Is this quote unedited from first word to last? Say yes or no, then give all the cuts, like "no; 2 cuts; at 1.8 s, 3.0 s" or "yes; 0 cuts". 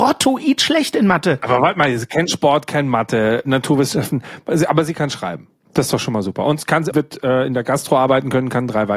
no; 1 cut; at 6.9 s